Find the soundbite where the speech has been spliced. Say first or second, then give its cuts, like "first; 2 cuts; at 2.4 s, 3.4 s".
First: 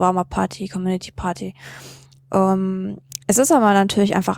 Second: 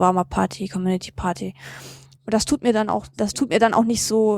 second; 1 cut; at 2.2 s